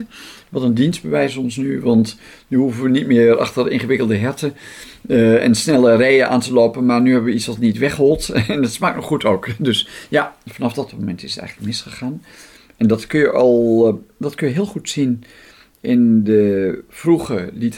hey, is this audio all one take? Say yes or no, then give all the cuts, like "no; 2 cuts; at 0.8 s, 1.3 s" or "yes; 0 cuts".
yes; 0 cuts